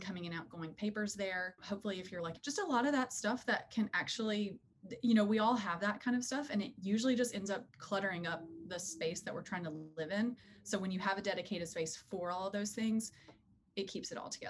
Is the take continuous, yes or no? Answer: no